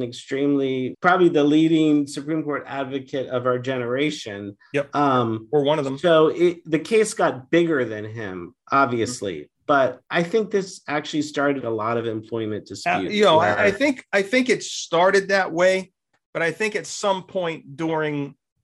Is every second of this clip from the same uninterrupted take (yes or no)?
no